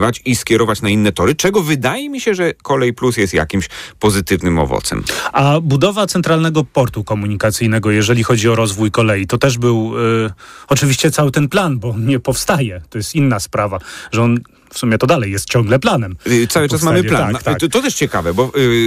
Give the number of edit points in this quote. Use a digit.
0